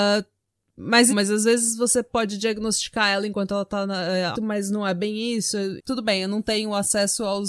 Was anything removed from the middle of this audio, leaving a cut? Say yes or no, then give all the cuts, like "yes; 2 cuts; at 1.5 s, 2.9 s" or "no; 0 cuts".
yes; 3 cuts; at 1.1 s, 4.3 s, 5.8 s